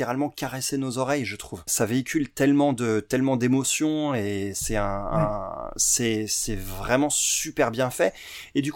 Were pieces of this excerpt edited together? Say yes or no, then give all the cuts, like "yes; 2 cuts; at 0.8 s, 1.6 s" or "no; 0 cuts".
no; 0 cuts